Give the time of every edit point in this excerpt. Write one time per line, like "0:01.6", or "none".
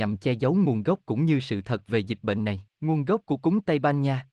0:02.7